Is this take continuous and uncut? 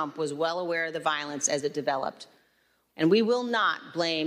no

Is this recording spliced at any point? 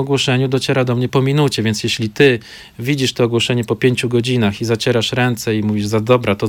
yes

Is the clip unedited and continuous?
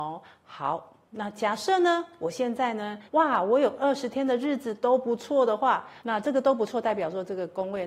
no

